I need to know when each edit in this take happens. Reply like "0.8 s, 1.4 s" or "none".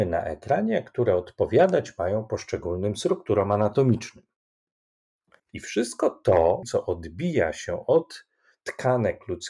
5.4 s, 6.6 s